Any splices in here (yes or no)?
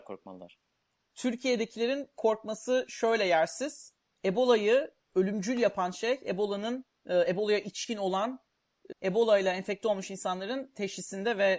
yes